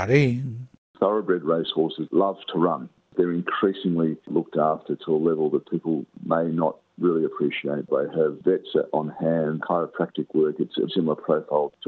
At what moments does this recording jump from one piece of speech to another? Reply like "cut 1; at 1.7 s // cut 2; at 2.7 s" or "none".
cut 1; at 9.6 s // cut 2; at 10.9 s

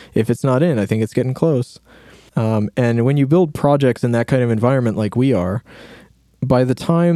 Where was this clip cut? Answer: none

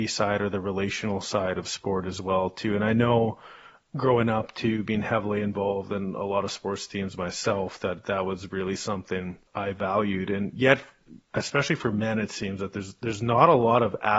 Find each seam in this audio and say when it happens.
cut 1; at 9.5 s

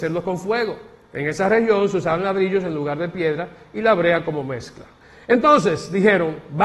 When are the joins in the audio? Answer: none

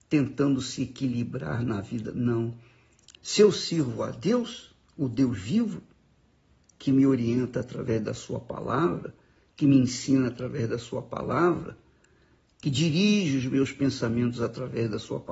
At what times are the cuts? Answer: cut 1; at 3.2 s

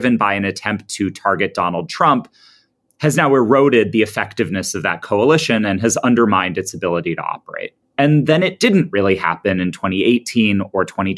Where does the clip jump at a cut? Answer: cut 1; at 7.8 s

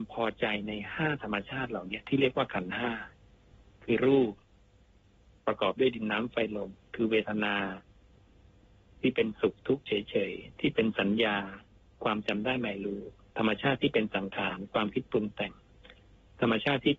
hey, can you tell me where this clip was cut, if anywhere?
none

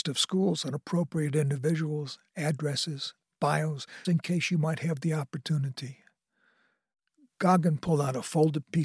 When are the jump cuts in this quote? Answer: cut 1; at 4.0 s

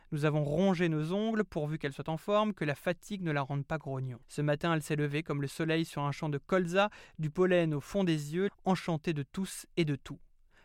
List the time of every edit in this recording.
cut 1; at 4.2 s // cut 2; at 8.5 s

